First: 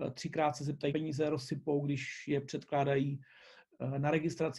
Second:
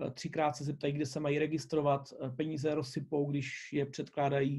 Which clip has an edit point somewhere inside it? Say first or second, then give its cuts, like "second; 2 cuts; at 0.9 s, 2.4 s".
first; 1 cut; at 0.9 s